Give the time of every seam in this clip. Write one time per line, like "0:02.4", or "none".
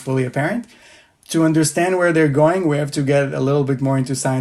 none